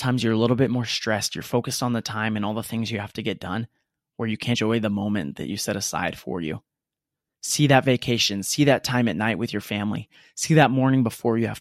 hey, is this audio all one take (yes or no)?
no